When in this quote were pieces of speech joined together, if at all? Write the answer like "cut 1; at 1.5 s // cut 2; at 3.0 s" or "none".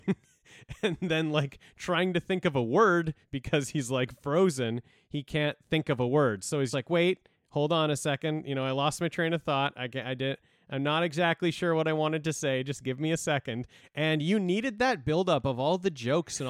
cut 1; at 6.7 s // cut 2; at 13.8 s